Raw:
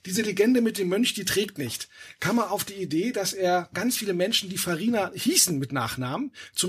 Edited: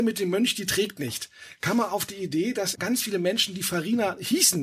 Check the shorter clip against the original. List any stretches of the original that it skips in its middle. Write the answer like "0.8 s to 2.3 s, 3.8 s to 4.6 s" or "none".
3.3 s to 3.7 s